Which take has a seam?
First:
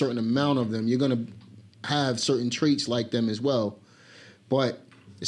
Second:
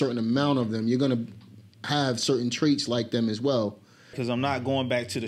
second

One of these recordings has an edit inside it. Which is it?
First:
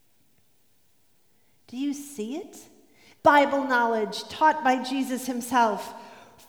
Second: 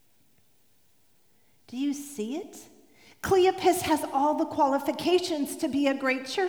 first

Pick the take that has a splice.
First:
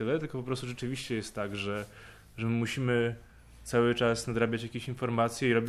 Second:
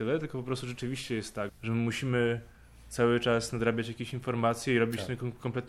second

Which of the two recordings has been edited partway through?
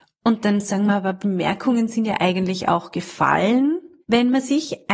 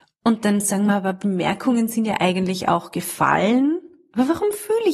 first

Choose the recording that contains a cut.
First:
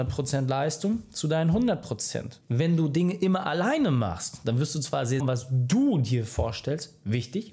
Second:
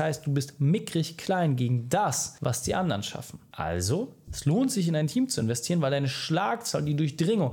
first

